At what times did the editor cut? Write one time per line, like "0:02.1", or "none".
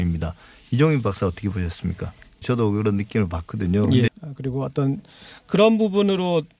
0:02.4
0:04.1

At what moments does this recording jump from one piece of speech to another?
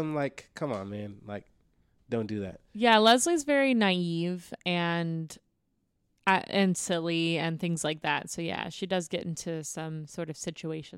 none

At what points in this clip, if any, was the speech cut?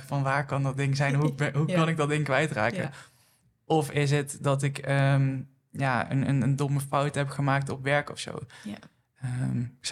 none

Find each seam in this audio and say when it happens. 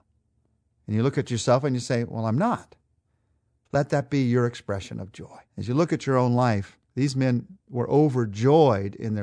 0:03.7
0:05.5
0:06.8

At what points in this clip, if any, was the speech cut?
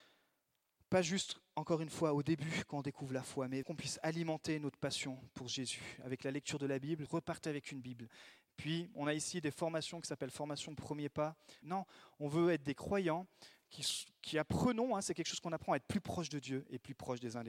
0:03.6
0:07.1
0:11.6

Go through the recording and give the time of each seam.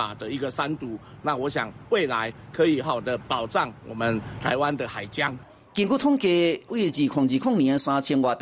0:02.8
0:06.7

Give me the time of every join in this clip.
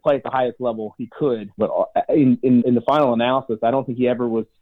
0:01.6
0:02.6

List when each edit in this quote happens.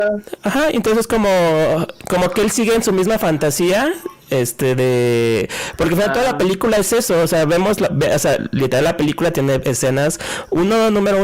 none

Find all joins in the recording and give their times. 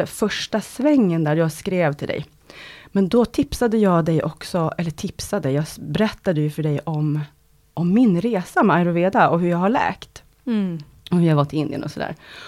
none

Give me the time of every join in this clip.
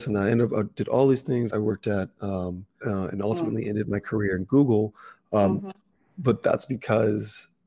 0:01.5
0:02.8

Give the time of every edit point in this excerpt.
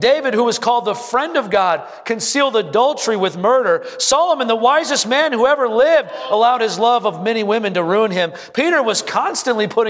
none

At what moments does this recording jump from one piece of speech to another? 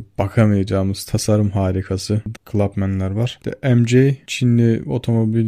0:02.3
0:03.4

